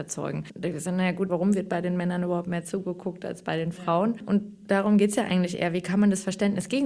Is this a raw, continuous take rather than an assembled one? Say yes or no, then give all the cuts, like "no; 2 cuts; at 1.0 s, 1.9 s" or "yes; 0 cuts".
no; 1 cut; at 1.3 s